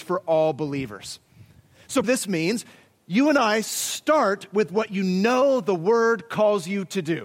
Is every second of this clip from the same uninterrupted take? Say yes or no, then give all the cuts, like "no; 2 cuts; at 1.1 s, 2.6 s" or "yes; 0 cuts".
no; 1 cut; at 2.0 s